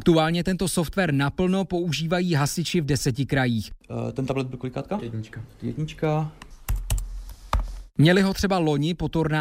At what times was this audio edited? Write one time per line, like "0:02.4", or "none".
none